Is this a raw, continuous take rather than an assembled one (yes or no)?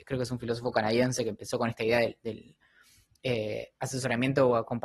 yes